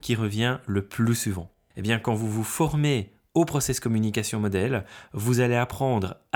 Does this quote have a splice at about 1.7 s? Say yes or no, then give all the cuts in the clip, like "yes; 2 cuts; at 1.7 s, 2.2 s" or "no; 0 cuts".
yes; 1 cut; at 1.7 s